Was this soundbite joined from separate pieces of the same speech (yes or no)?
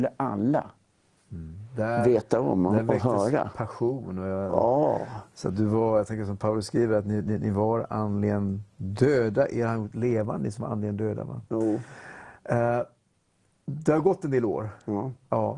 no